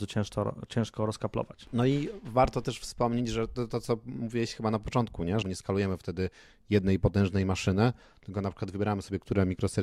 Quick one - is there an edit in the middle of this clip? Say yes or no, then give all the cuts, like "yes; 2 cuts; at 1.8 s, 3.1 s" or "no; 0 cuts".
yes; 1 cut; at 5.4 s